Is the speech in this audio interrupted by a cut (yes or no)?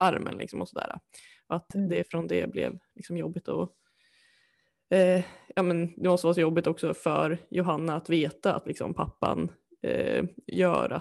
no